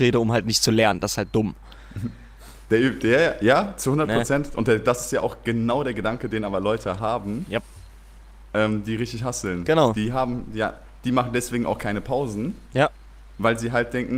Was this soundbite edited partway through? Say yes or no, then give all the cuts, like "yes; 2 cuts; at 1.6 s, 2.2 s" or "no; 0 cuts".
no; 0 cuts